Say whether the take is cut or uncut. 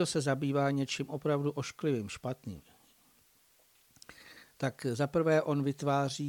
uncut